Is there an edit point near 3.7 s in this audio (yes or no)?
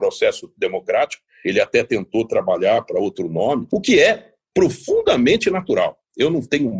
yes